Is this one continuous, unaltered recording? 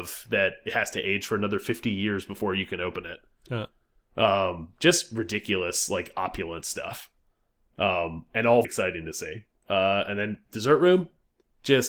no; 1 cut; at 8.6 s

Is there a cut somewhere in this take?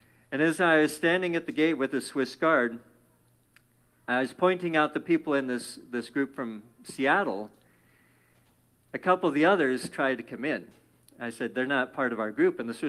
no; 0 cuts

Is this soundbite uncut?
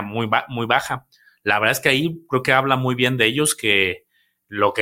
yes; 0 cuts

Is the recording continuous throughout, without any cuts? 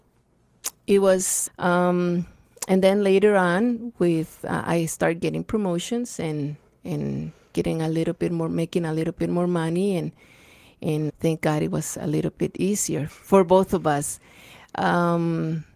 no; 3 cuts; at 1.5 s, 11.1 s, 13.1 s

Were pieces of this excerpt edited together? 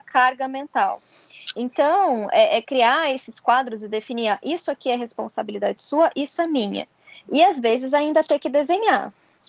no; 0 cuts

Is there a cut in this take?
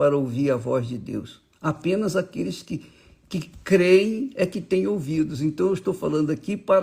no; 0 cuts

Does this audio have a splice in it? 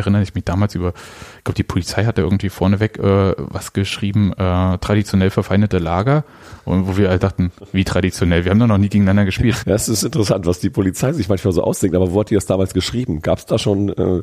yes; 1 cut; at 9.6 s

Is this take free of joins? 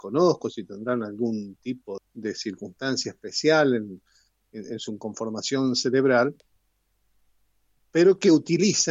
no; 1 cut; at 2.0 s

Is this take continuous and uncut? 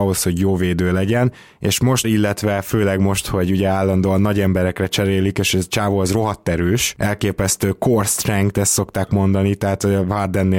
no; 1 cut; at 2.0 s

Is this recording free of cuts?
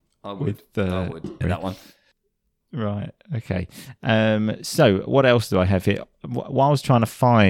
no; 1 cut; at 1.4 s

